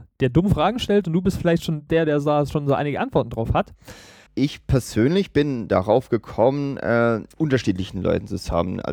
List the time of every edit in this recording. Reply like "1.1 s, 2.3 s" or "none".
4.3 s, 7.3 s

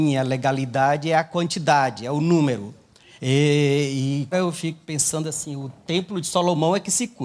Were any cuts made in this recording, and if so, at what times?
3.2 s, 4.3 s

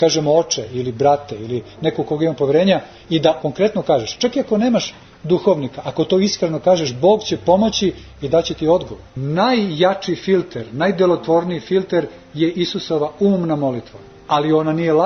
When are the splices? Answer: 9.1 s

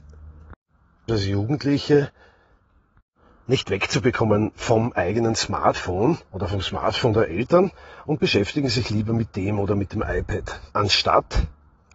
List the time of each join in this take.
1.1 s, 6.3 s, 10.7 s

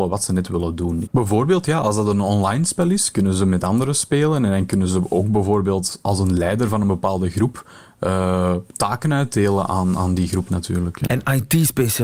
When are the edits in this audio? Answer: 1.1 s, 11.1 s

